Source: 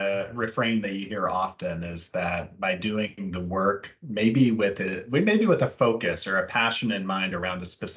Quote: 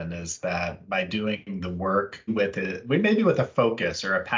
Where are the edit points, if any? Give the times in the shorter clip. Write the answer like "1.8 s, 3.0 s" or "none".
2.3 s

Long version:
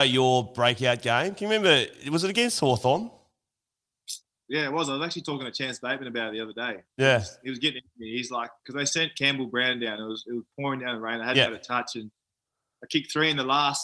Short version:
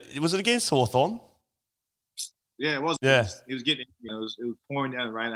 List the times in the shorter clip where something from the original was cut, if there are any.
3.0 s, 4.1 s

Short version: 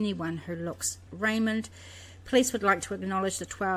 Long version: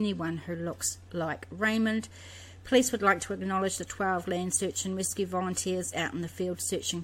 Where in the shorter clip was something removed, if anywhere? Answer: 1.1 s

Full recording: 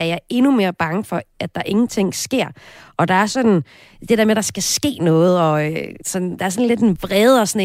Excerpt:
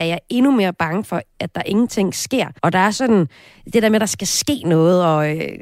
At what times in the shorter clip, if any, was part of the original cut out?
2.6 s

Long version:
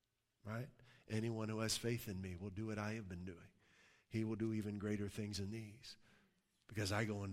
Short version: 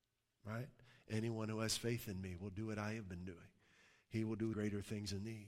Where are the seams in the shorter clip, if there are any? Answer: 4.5 s

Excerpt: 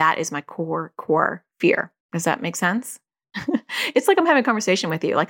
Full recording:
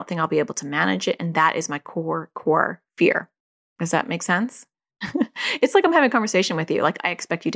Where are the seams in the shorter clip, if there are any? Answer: 2.0 s

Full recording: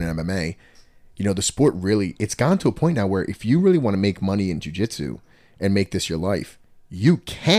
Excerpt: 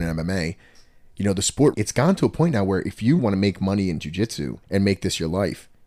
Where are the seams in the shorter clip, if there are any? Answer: 1.7 s, 3.2 s, 4.6 s

